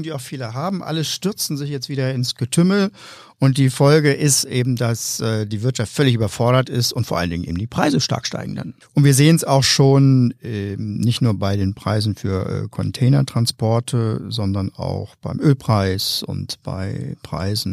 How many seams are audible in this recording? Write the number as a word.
one